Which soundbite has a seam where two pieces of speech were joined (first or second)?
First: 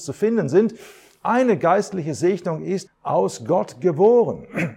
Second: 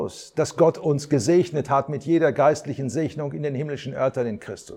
first